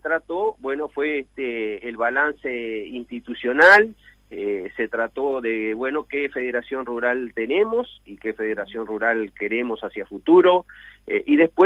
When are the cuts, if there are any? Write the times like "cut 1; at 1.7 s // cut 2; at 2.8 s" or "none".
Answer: none

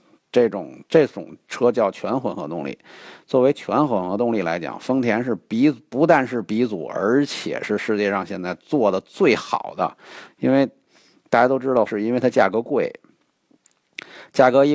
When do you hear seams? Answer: cut 1; at 10.3 s // cut 2; at 11.9 s

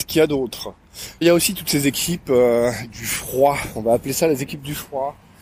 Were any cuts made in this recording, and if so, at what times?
cut 1; at 1.2 s

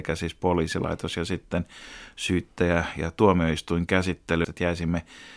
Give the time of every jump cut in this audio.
cut 1; at 4.4 s

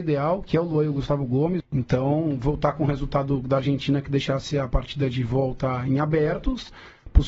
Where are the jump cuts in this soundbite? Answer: cut 1; at 1.6 s

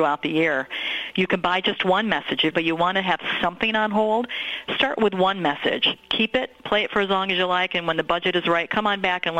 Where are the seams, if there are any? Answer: cut 1; at 2.5 s

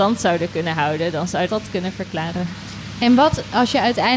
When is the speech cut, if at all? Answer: cut 1; at 1.5 s

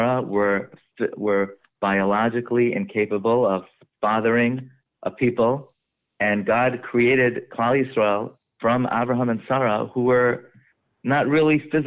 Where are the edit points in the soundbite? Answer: none

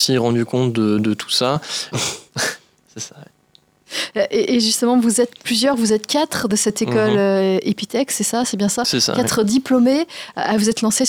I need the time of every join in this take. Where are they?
cut 1; at 1.9 s

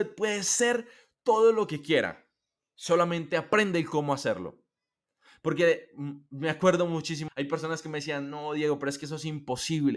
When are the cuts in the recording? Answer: cut 1; at 7.3 s

